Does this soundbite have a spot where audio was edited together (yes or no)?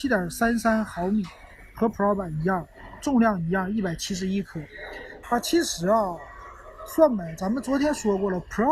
yes